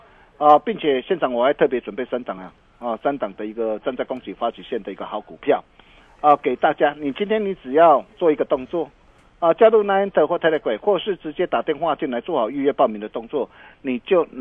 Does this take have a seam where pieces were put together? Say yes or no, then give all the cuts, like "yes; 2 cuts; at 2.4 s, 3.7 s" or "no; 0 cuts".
no; 0 cuts